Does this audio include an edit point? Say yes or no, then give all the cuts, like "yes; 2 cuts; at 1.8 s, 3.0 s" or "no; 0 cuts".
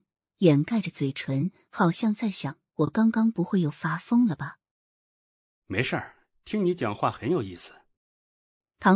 no; 0 cuts